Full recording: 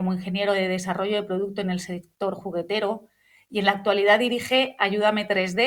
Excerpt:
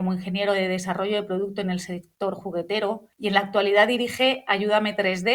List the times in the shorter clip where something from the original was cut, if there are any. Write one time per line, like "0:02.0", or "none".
0:03.1